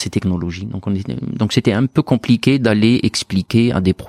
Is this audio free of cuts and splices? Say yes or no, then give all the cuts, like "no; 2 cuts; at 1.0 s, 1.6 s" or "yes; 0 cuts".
yes; 0 cuts